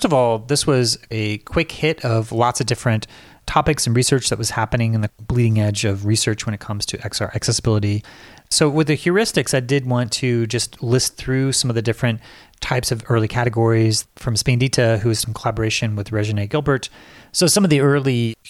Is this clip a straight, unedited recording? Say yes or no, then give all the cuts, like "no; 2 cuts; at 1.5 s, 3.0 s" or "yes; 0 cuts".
yes; 0 cuts